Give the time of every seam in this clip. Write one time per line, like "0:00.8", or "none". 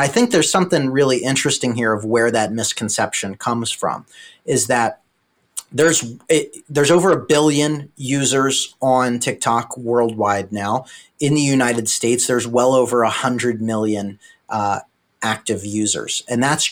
none